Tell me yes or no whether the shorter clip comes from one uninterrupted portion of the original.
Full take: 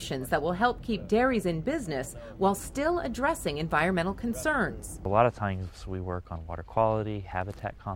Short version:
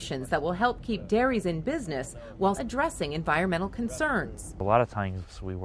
no